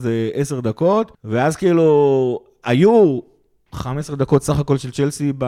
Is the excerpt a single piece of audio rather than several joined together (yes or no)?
no